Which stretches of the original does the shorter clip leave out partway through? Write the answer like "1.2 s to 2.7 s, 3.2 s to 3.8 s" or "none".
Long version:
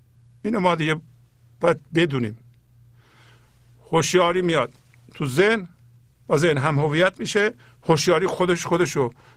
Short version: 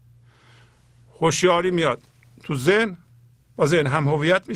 none